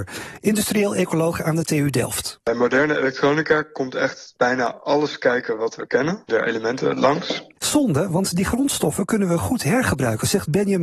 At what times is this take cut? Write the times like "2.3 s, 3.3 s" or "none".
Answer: 6.3 s, 7.6 s